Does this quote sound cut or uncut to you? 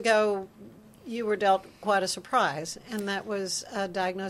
uncut